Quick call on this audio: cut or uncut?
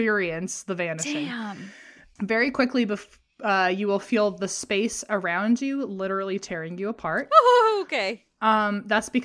uncut